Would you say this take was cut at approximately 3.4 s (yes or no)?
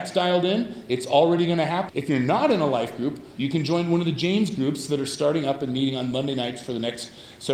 yes